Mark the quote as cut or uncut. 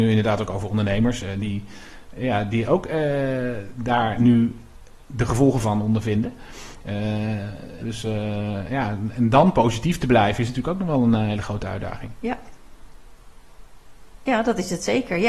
cut